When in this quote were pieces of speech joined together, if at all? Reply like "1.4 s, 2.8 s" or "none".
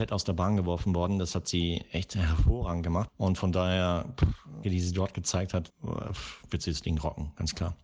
3.1 s, 4.6 s, 5.7 s